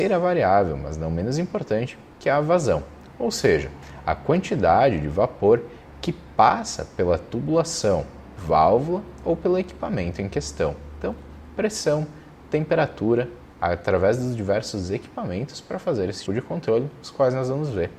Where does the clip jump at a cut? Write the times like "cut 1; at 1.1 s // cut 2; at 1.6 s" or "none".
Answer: cut 1; at 13.5 s // cut 2; at 16.3 s